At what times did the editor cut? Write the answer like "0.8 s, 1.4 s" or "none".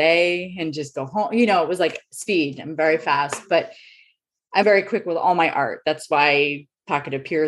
4.6 s